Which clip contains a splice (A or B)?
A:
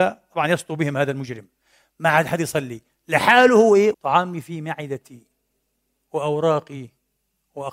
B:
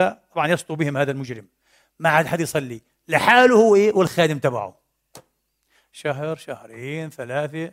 A